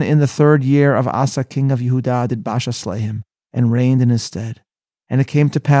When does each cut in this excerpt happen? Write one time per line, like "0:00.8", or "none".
none